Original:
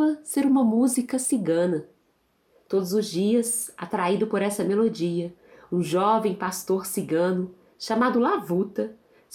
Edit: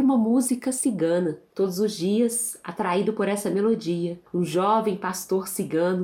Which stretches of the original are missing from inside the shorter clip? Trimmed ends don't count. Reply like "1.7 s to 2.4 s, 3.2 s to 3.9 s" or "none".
2.0 s to 2.6 s, 5.4 s to 5.6 s